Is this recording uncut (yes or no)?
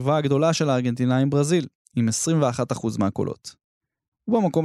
yes